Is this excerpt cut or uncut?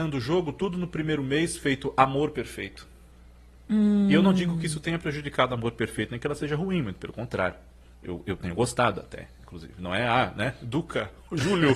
uncut